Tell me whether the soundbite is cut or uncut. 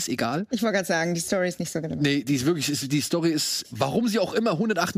cut